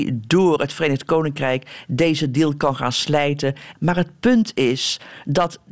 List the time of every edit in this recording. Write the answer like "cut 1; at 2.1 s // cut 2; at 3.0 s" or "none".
cut 1; at 3.7 s